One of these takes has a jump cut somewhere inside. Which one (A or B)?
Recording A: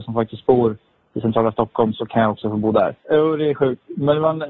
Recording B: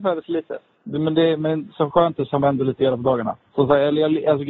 A